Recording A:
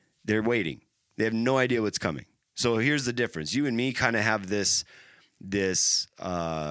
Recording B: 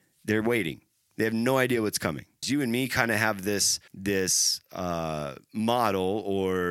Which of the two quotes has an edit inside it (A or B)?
B